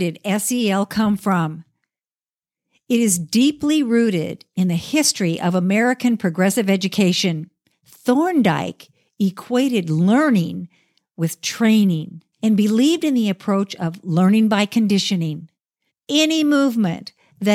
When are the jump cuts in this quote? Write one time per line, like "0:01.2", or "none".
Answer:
0:07.7
0:12.3
0:15.9